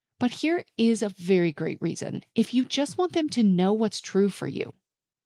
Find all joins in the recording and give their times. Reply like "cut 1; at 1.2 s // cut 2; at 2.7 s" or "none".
cut 1; at 2.2 s

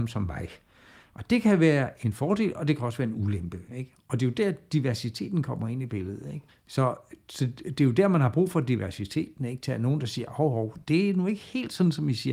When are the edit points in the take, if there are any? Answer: cut 1; at 6.5 s // cut 2; at 10.8 s

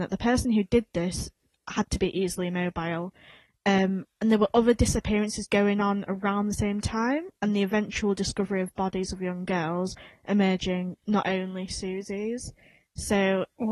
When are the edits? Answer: none

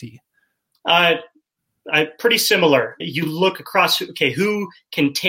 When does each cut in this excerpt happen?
cut 1; at 3.0 s

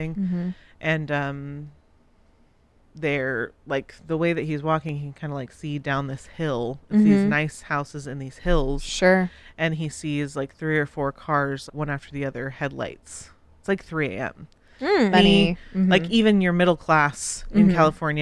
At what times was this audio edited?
cut 1; at 11.7 s // cut 2; at 15.1 s

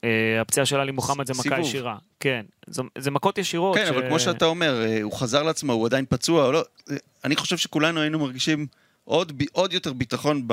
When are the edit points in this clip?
none

